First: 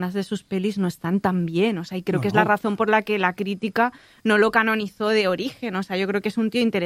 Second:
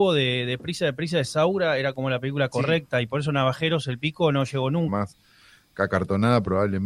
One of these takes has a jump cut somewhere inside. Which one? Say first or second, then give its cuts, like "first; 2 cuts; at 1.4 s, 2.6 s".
second; 1 cut; at 4.9 s